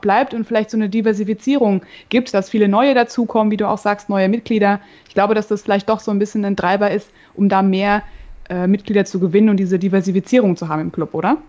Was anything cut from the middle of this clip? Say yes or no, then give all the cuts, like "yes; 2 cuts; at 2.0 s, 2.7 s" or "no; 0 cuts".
no; 0 cuts